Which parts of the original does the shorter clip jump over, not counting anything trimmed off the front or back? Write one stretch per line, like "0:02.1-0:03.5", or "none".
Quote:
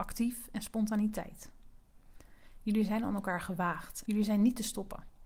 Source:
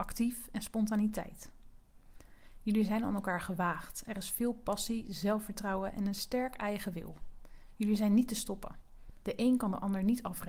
0:04.0-0:07.8